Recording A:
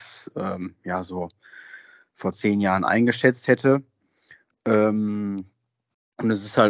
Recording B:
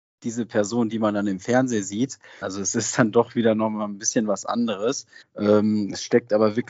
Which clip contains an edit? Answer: B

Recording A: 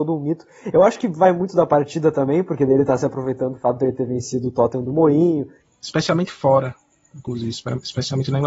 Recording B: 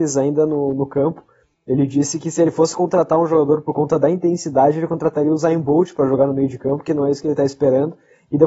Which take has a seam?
A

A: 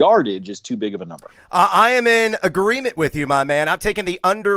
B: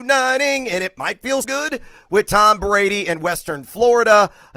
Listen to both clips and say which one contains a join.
B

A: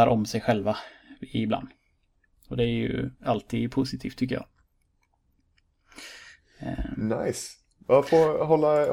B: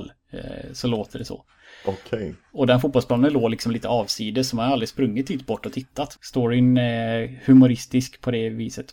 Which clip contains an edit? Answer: B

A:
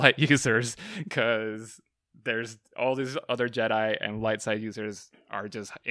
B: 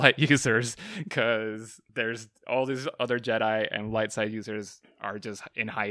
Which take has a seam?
B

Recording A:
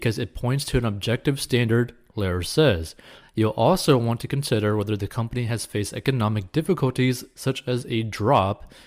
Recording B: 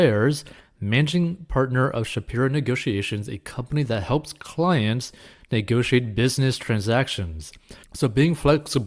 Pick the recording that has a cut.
B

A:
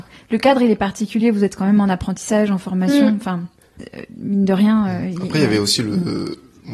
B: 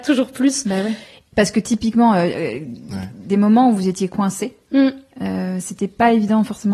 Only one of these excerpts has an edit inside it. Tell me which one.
B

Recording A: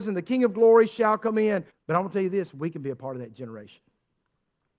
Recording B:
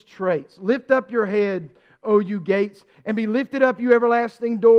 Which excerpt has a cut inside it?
A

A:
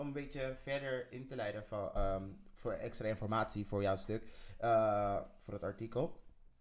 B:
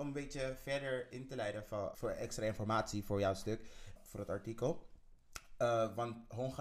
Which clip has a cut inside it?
B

